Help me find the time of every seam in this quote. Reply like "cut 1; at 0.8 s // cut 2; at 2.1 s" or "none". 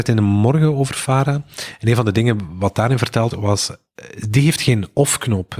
cut 1; at 3.3 s